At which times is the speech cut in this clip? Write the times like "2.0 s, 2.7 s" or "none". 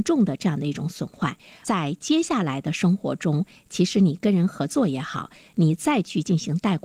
none